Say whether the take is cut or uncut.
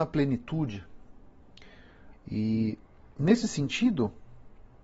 cut